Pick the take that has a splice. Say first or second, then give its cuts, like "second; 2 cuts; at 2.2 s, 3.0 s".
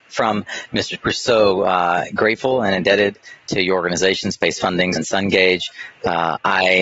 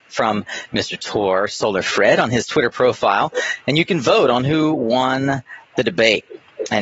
first; 2 cuts; at 1.0 s, 5.0 s